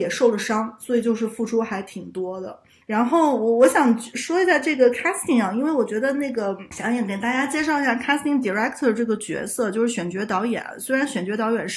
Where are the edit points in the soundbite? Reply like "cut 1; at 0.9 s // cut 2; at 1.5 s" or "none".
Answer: none